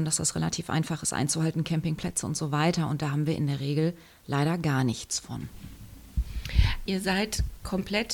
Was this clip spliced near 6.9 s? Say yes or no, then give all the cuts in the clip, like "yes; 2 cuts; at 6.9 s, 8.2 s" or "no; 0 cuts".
yes; 1 cut; at 6.9 s